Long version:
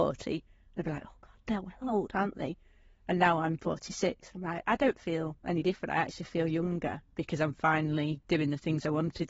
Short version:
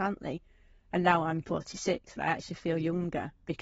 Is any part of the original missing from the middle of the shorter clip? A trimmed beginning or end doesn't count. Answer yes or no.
yes